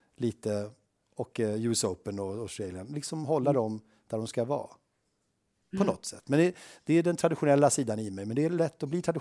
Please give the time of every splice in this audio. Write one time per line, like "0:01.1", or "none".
none